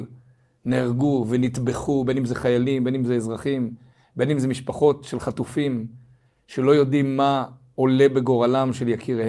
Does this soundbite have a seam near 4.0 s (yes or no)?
no